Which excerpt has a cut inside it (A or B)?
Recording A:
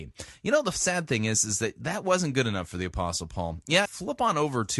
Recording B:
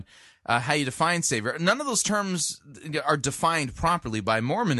A